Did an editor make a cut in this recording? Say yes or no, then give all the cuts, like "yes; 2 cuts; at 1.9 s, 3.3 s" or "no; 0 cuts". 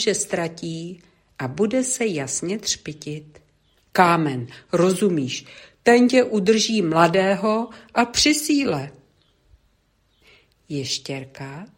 yes; 1 cut; at 3.8 s